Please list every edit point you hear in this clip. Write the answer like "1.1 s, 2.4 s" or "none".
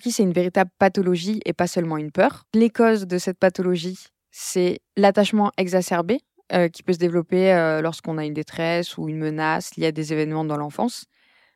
none